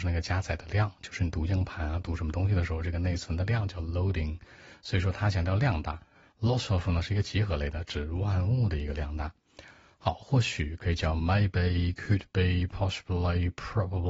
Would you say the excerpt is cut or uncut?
uncut